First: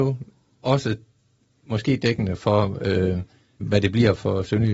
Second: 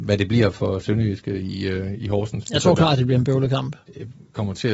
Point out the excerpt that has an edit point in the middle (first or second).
first